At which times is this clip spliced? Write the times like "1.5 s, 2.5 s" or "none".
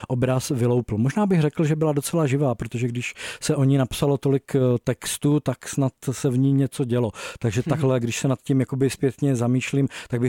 none